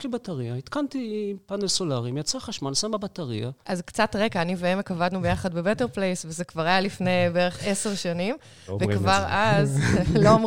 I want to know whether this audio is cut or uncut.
uncut